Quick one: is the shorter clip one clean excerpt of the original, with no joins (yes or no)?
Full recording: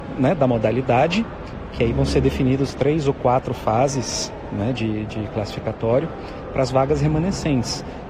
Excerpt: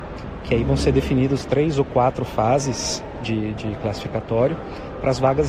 no